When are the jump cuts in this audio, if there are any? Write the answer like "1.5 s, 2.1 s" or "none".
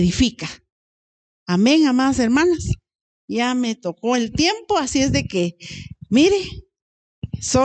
none